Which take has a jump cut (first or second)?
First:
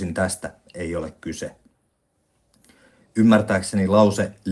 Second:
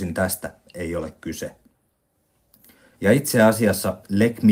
second